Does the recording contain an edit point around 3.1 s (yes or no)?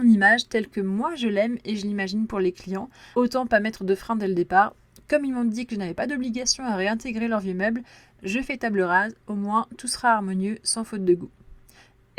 yes